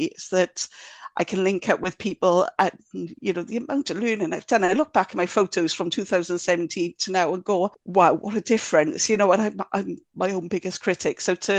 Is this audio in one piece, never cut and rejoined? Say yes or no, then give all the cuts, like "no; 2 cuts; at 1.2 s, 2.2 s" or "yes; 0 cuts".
yes; 0 cuts